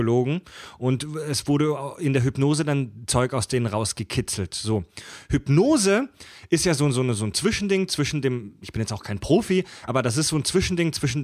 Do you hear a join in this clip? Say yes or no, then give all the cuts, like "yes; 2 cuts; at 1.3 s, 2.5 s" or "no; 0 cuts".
no; 0 cuts